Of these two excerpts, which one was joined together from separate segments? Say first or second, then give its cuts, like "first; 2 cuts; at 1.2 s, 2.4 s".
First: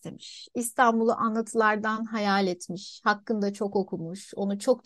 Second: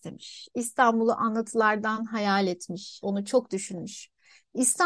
second; 1 cut; at 3.0 s